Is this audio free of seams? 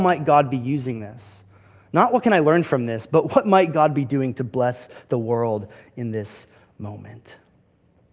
yes; 0 cuts

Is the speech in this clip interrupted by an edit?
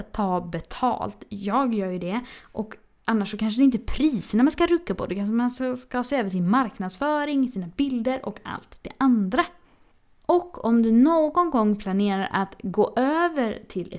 no; 0 cuts

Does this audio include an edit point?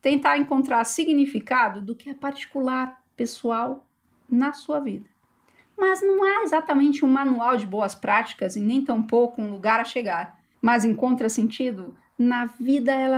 yes; 2 cuts; at 5.6 s, 10.5 s

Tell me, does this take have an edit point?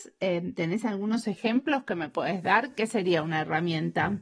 no; 0 cuts

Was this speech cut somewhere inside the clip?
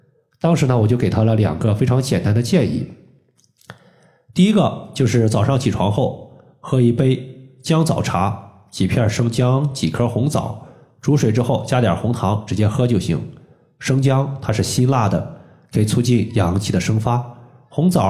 no; 0 cuts

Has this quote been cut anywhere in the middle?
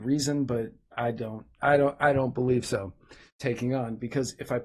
yes; 1 cut; at 3.3 s

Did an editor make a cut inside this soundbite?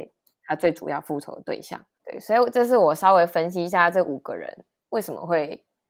yes; 1 cut; at 2.0 s

